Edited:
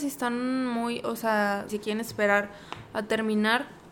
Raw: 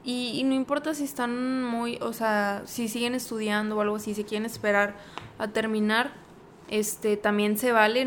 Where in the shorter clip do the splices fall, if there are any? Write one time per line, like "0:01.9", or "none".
0:01.7